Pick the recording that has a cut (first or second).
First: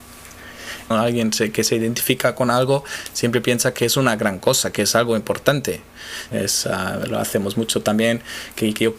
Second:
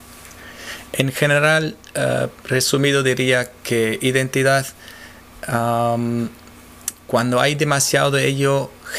first